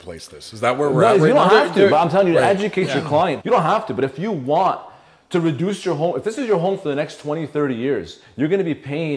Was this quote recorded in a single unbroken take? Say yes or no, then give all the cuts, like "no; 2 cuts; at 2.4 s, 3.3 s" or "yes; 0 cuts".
no; 1 cut; at 3.4 s